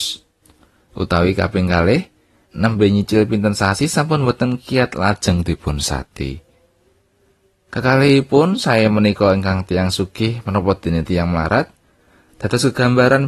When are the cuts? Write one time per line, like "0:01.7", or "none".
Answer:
0:02.5

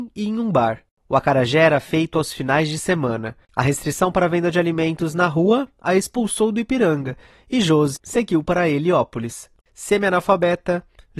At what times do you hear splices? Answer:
0:08.0
0:09.6

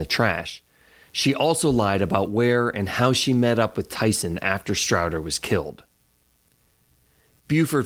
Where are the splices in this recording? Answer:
none

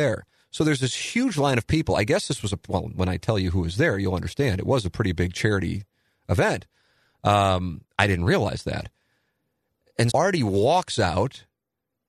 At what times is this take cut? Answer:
0:10.1

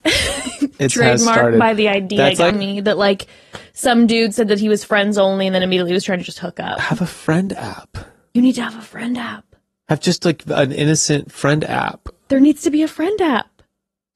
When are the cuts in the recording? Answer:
0:02.5

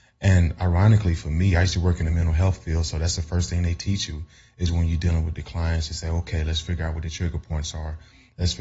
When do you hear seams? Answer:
none

